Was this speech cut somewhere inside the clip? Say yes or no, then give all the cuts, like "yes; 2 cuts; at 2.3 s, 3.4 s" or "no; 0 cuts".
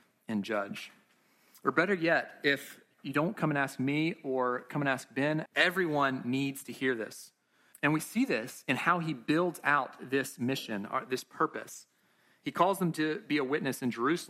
yes; 2 cuts; at 5.5 s, 7.7 s